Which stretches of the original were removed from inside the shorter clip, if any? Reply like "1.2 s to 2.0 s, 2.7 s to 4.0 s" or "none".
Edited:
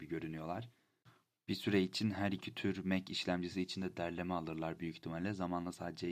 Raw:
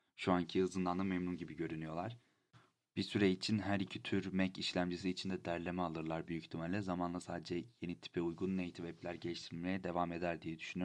none